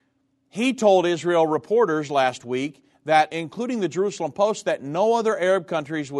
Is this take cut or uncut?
uncut